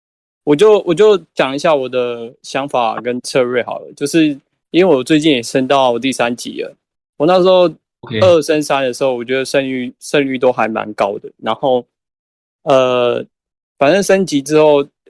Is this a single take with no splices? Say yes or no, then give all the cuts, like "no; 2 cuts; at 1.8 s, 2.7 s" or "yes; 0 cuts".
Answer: yes; 0 cuts